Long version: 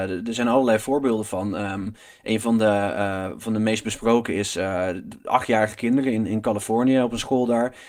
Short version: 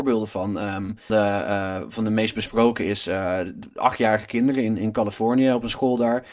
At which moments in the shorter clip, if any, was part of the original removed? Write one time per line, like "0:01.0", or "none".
0:01.1